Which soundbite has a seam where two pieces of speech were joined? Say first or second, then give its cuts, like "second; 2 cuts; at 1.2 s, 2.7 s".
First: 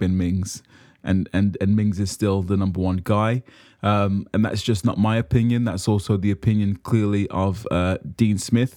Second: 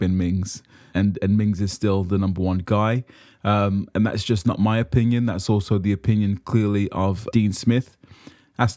second; 2 cuts; at 0.9 s, 7.3 s